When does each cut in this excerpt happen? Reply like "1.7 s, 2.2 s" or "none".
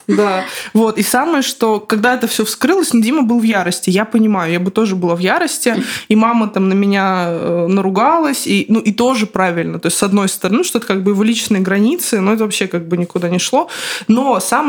none